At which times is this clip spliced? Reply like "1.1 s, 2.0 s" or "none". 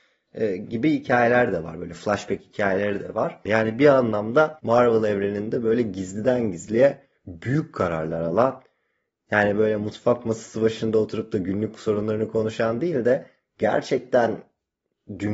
3.5 s